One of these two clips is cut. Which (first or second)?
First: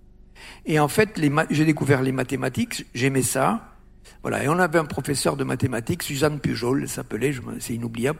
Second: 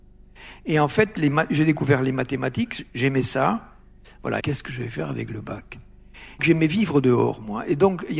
second